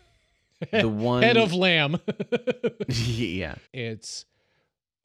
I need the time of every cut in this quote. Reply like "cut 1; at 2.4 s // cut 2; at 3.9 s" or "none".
cut 1; at 3.7 s